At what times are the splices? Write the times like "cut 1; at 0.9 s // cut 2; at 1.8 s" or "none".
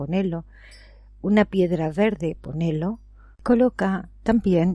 cut 1; at 3.3 s